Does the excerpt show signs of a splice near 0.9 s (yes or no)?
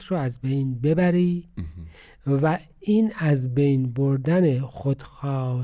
no